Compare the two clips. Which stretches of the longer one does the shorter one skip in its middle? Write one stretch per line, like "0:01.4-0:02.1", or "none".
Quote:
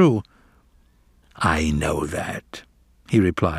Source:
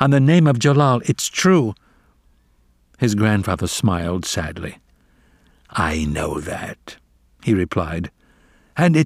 0:02.7-0:05.6